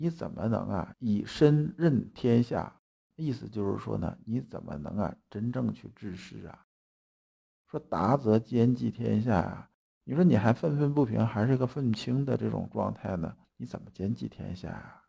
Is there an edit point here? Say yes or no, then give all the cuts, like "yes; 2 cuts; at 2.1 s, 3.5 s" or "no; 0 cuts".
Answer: no; 0 cuts